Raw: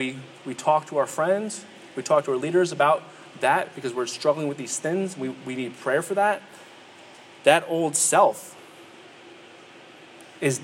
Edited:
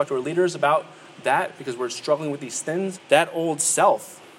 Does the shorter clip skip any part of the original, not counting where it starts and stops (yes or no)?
yes